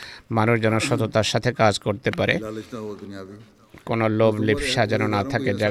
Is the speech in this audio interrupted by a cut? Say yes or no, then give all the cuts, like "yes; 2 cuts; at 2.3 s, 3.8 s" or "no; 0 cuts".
no; 0 cuts